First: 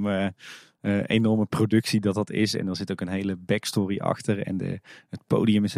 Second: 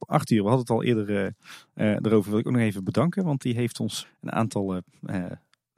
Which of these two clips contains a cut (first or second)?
second